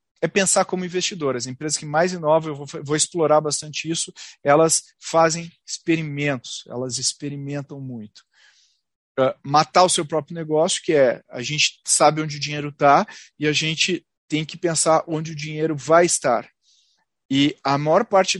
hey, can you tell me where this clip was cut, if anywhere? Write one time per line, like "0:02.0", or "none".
none